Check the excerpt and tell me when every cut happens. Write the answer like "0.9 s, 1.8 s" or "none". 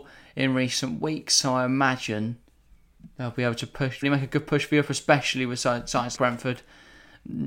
4.0 s, 6.2 s